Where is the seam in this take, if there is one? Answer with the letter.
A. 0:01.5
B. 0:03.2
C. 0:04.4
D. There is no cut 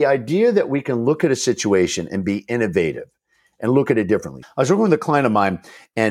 C